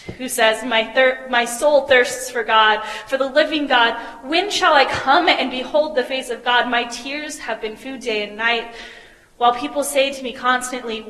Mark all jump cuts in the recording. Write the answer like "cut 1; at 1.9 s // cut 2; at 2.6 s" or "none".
none